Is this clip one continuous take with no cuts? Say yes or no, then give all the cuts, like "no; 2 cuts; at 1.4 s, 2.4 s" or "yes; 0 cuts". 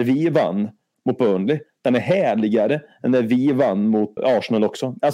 no; 1 cut; at 4.2 s